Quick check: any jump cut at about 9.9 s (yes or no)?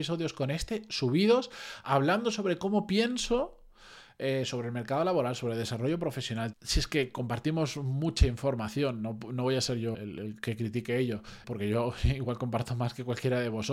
yes